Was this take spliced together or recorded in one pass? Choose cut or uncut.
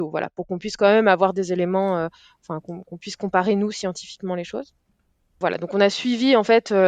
uncut